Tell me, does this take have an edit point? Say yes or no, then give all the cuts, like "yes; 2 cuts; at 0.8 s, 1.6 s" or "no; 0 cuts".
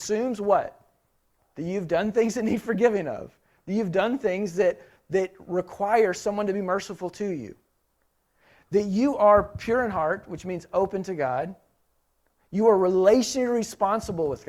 no; 0 cuts